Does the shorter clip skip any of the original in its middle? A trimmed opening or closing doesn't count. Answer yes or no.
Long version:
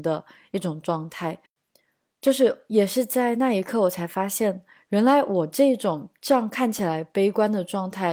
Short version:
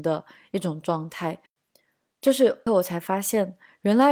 yes